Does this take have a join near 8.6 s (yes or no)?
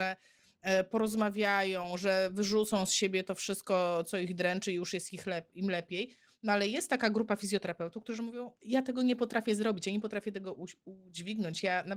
yes